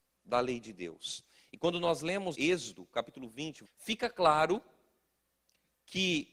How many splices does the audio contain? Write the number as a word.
two